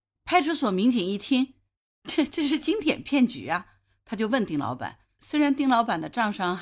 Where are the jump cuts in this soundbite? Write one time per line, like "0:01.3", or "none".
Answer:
0:05.2

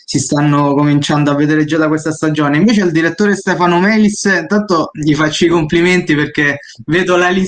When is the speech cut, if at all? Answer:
none

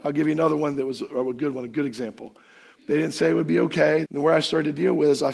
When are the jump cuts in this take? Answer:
0:02.7
0:04.0

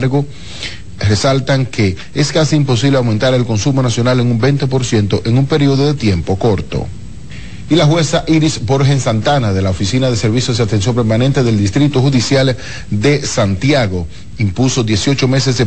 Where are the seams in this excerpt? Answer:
none

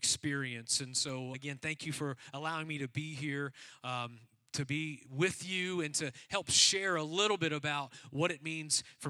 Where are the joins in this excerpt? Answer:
0:01.3

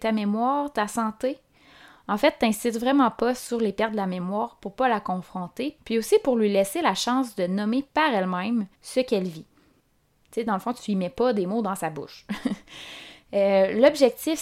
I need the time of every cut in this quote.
0:08.7

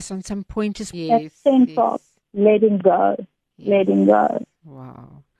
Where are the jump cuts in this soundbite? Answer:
0:00.9

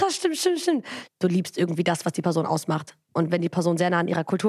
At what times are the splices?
0:01.1

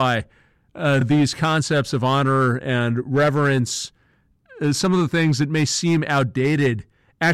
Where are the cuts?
none

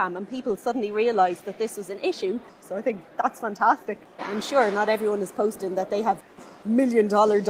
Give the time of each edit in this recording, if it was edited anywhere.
0:02.6
0:04.2

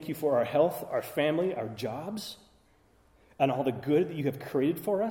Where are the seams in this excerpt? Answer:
none

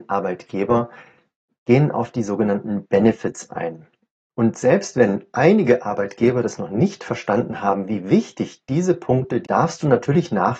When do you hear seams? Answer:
0:04.2
0:09.4

